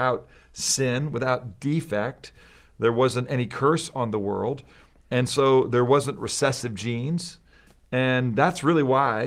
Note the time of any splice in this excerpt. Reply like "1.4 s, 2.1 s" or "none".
none